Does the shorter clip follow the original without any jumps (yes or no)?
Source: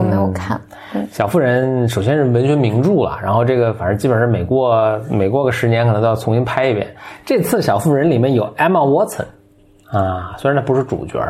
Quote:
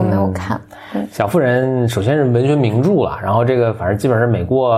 yes